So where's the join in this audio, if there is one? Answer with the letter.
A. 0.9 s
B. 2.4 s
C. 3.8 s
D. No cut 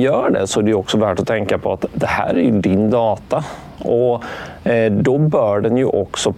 D